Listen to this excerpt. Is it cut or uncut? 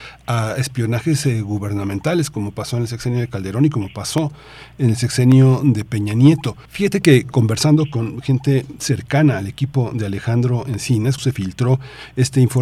cut